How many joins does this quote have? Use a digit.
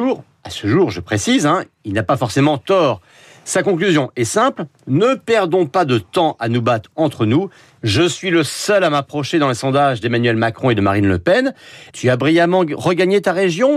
2